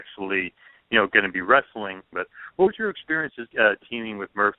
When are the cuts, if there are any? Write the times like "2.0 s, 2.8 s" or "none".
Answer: 2.1 s, 3.5 s